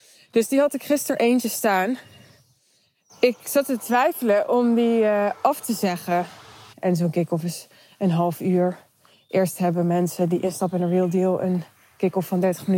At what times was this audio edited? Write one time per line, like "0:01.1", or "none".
0:06.7